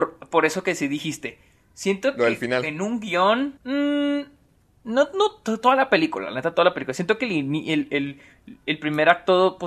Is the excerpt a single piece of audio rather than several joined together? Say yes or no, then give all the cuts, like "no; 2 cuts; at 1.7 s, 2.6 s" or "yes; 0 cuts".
no; 1 cut; at 3.6 s